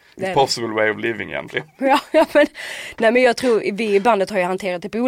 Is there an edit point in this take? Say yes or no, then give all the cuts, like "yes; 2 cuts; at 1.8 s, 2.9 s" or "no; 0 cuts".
no; 0 cuts